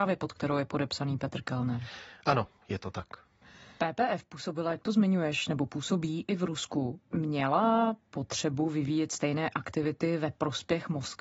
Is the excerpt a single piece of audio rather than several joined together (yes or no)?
yes